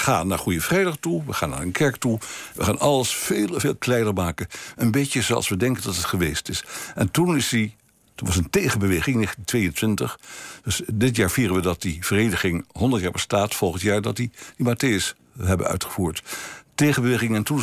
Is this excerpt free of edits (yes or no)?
yes